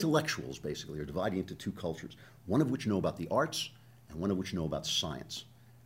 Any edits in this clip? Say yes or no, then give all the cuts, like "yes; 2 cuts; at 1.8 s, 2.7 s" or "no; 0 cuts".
no; 0 cuts